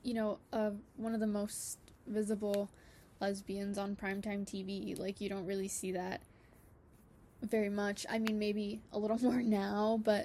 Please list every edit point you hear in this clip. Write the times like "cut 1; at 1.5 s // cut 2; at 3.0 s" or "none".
none